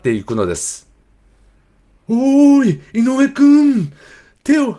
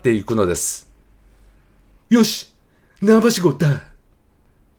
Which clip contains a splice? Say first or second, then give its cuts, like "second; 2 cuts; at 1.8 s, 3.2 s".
second; 1 cut; at 2.0 s